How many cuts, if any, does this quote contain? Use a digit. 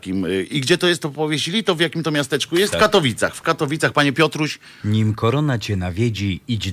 2